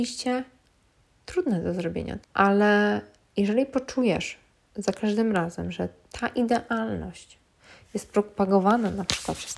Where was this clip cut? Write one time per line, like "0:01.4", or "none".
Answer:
0:02.2